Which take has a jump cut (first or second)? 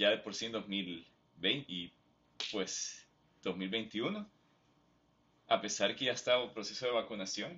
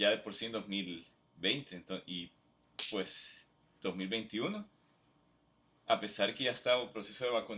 first